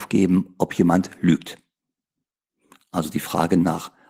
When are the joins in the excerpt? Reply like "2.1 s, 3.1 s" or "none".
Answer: none